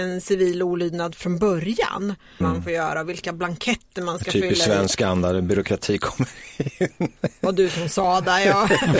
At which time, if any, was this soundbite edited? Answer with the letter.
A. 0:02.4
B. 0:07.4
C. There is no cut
A